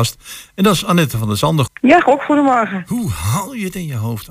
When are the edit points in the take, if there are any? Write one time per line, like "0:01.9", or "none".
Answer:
0:01.7